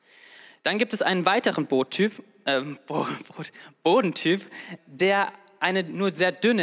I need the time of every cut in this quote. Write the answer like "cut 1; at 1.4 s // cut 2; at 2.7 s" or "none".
cut 1; at 4.8 s